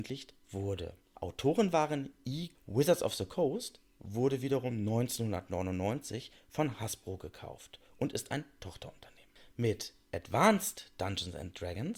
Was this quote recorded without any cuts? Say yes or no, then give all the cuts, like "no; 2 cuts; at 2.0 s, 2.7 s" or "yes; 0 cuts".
no; 1 cut; at 2.5 s